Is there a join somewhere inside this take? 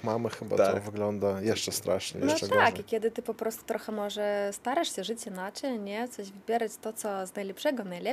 no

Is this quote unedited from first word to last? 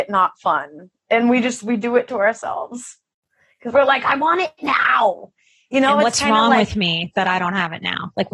yes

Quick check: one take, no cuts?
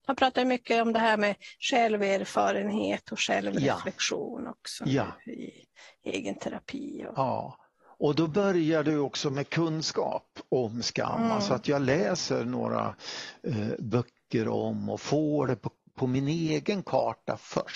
yes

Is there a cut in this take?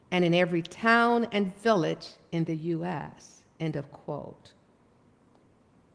no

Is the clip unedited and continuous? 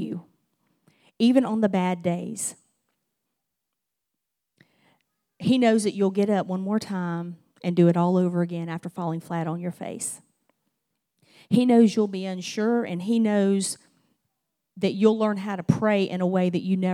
yes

